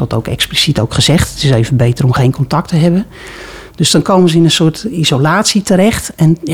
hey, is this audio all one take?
yes; 0 cuts

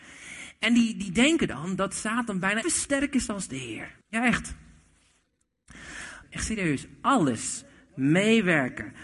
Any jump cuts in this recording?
yes; 3 cuts; at 2.6 s, 4.0 s, 6.2 s

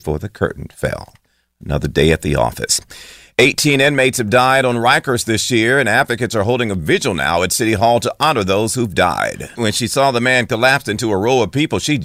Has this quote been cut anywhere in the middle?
yes; 1 cut; at 9.6 s

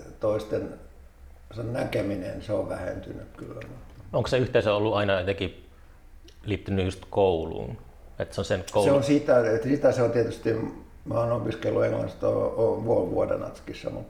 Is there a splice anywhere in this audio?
no; 0 cuts

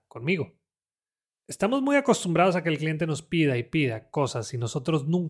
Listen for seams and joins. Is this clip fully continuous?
yes; 0 cuts

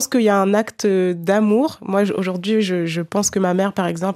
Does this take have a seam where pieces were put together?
no; 0 cuts

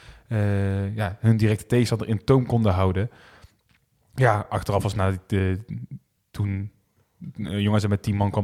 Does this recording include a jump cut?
no; 0 cuts

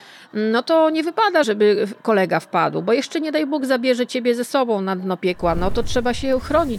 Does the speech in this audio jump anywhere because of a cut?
yes; 1 cut; at 1.4 s

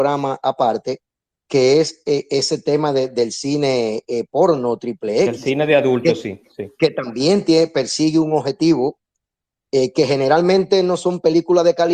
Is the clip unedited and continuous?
yes; 0 cuts

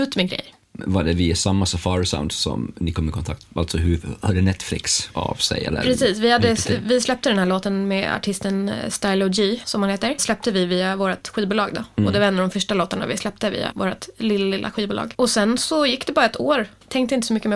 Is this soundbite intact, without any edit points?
yes; 0 cuts

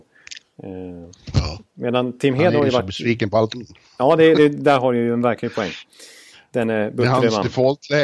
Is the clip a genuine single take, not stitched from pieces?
yes; 0 cuts

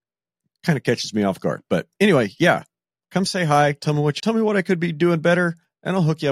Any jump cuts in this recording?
yes; 1 cut; at 4.2 s

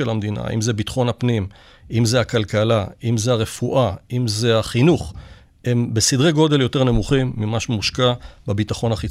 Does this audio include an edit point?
no; 0 cuts

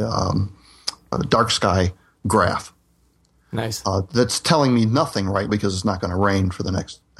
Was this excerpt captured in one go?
no; 2 cuts; at 1.1 s, 5.5 s

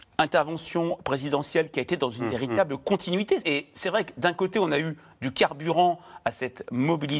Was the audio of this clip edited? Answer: yes; 1 cut; at 3.4 s

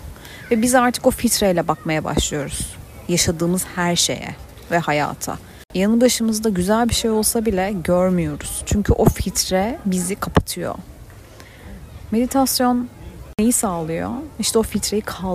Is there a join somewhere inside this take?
no; 0 cuts

